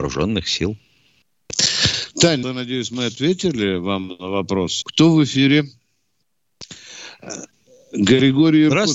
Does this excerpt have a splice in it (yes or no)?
yes